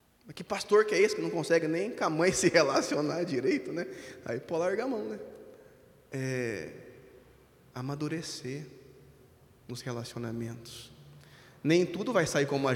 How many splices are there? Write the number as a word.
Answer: zero